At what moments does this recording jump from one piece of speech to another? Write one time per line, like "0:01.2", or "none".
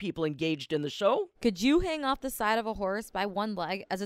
0:01.3